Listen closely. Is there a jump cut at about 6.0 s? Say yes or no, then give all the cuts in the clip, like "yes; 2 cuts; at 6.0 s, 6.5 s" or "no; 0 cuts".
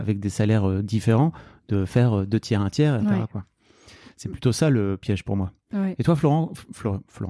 no; 1 cut; at 3.0 s